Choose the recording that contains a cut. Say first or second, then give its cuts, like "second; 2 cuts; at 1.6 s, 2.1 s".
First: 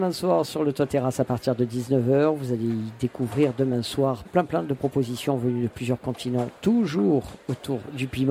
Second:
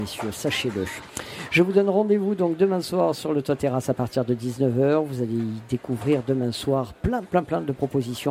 first; 1 cut; at 4.2 s